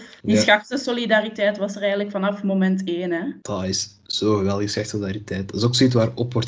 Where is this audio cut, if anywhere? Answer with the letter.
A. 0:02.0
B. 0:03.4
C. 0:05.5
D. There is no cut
D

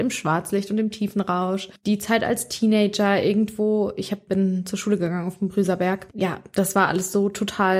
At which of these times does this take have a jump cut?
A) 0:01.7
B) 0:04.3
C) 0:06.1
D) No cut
B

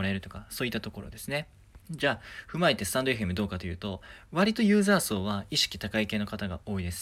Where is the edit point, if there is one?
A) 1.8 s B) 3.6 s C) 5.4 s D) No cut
A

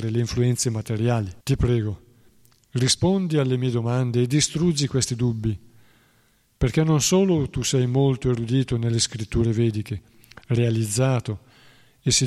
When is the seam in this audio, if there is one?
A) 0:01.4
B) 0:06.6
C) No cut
A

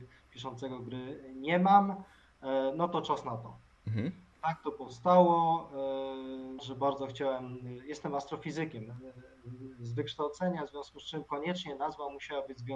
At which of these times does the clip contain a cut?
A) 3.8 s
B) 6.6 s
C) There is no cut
B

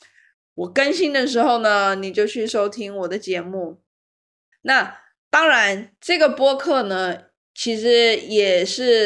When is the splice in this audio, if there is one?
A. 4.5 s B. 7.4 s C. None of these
A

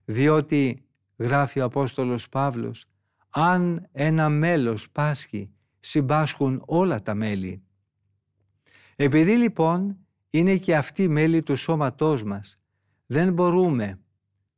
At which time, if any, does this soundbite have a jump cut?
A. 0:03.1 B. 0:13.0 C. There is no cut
C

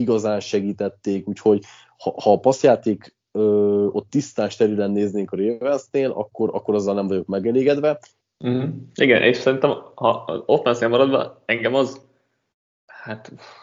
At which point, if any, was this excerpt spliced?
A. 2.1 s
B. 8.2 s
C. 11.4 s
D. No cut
B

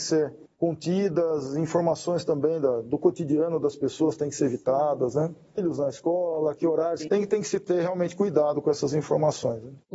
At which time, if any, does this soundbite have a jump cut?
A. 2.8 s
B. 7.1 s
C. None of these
B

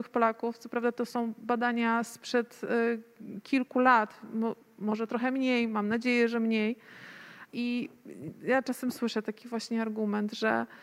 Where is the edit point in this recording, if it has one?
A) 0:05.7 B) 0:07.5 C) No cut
B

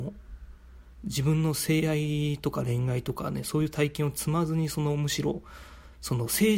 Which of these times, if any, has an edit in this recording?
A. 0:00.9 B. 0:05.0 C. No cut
C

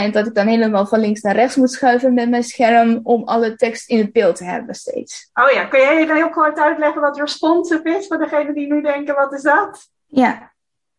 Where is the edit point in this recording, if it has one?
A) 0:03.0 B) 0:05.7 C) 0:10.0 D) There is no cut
C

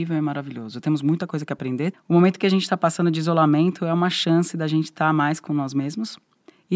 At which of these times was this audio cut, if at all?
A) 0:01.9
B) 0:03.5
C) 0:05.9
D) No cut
A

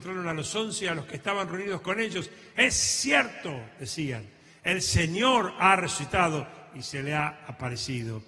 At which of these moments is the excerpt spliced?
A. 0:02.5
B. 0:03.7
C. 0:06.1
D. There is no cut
D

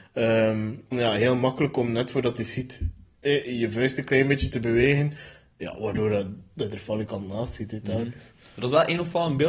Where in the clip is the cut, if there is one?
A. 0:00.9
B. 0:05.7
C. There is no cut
A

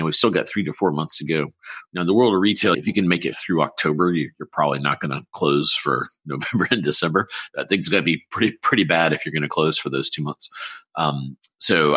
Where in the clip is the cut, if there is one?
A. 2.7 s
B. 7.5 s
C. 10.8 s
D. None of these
A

